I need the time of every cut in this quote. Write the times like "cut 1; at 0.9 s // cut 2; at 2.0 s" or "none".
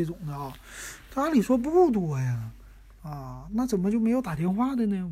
none